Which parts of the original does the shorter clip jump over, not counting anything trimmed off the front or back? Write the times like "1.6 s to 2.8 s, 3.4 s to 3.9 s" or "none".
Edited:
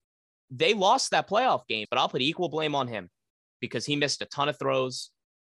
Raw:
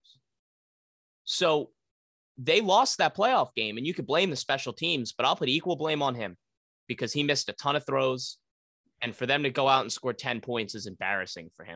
3.7 s to 5.1 s